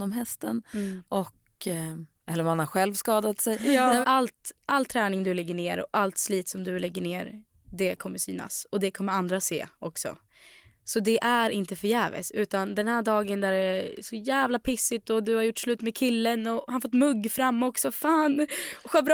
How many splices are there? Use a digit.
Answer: 2